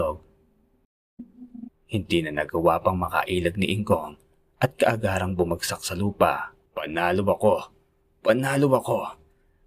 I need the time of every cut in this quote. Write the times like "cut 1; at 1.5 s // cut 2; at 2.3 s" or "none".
cut 1; at 1.7 s // cut 2; at 6.7 s